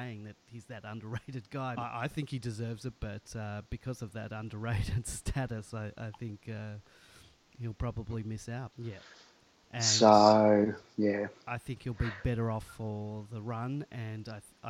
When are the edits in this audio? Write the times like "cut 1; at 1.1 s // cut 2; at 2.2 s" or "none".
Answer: cut 1; at 1.8 s // cut 2; at 8.7 s